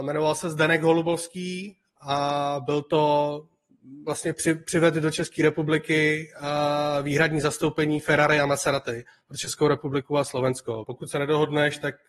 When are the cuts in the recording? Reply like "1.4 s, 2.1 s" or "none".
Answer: 10.8 s

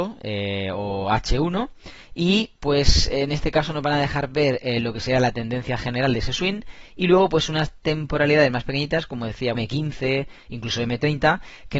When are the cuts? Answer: 9.5 s

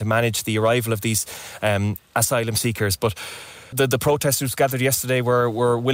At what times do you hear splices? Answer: 3.7 s

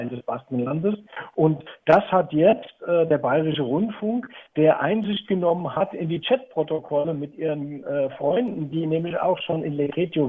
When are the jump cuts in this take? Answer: none

